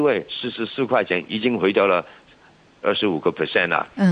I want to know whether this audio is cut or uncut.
uncut